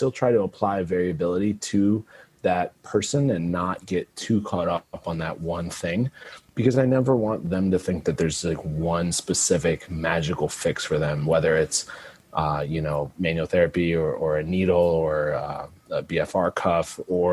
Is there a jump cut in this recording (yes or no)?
no